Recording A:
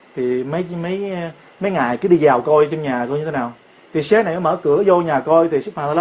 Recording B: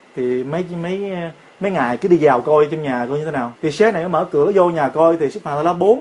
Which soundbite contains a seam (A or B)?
B